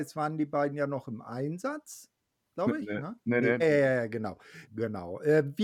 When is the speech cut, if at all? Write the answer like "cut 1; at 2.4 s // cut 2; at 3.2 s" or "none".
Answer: cut 1; at 3.6 s // cut 2; at 4.6 s